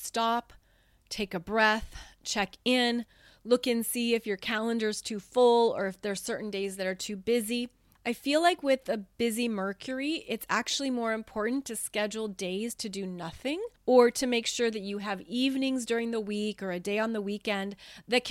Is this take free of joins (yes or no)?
yes